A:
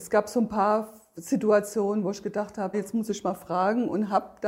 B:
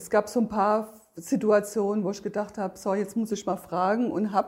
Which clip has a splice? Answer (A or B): A